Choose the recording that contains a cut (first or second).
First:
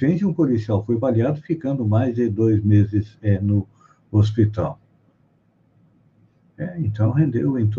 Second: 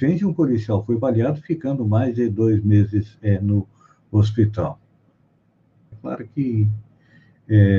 second